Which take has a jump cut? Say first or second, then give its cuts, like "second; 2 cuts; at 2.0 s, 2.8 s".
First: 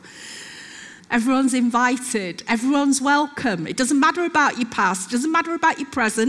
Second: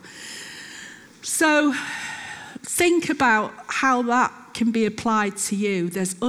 first; 1 cut; at 1.0 s